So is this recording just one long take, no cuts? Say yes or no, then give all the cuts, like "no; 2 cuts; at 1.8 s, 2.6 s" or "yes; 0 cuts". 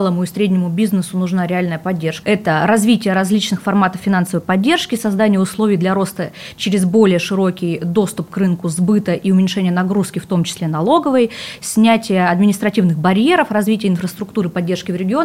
no; 1 cut; at 2.2 s